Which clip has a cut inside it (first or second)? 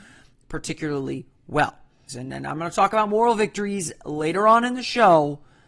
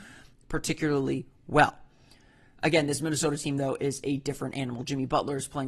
first